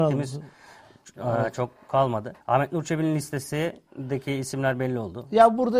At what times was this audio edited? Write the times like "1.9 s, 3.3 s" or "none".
2.4 s, 3.9 s